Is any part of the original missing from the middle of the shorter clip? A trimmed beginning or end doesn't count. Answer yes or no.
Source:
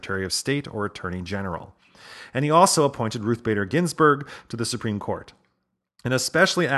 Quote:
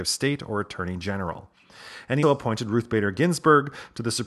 yes